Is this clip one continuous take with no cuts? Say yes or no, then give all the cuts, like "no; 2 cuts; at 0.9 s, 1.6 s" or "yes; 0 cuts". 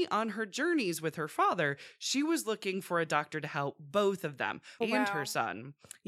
no; 1 cut; at 4.8 s